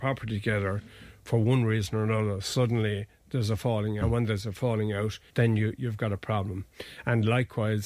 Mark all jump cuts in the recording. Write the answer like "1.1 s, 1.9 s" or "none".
4.0 s, 5.3 s